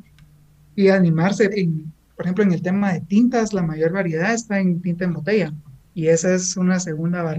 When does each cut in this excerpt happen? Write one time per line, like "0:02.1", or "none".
0:01.5
0:05.9